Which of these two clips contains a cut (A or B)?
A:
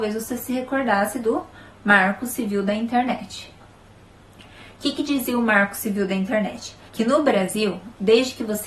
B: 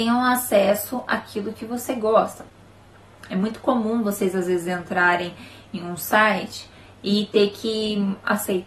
A